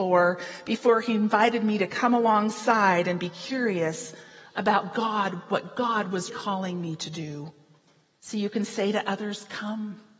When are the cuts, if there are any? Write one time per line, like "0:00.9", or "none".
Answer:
0:06.3
0:08.2